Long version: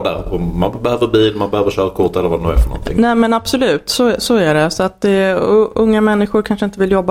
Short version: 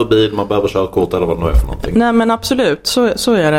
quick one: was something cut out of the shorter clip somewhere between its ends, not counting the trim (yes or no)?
no